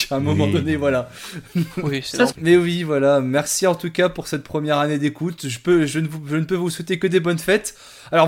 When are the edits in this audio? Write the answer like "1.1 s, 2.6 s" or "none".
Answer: 2.3 s